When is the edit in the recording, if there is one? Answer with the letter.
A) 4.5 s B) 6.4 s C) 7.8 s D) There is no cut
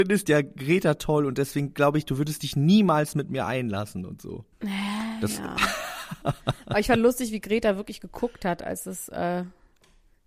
A